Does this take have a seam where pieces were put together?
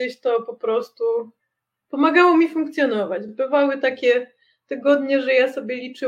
no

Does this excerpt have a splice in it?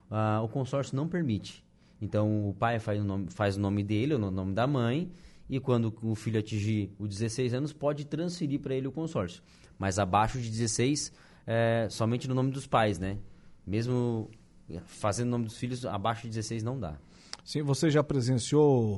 no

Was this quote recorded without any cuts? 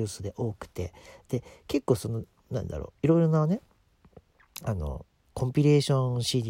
yes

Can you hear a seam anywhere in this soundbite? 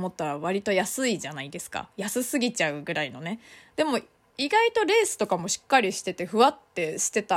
no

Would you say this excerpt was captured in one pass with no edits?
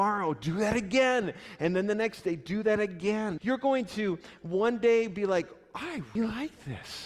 no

